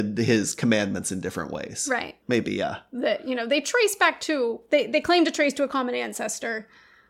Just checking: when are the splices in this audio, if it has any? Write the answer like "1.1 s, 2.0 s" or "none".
2.2 s